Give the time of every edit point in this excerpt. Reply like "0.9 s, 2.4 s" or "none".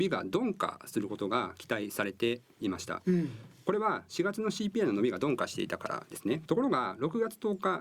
6.5 s